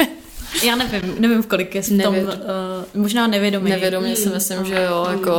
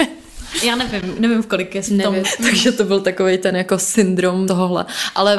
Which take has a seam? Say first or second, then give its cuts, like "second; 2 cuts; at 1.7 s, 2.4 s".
second; 2 cuts; at 2.2 s, 4.5 s